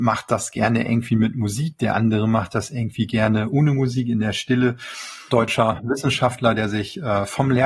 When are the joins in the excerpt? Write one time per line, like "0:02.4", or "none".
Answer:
0:05.3